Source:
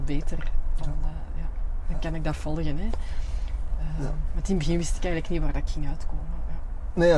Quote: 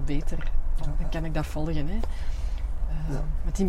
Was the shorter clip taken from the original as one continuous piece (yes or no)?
no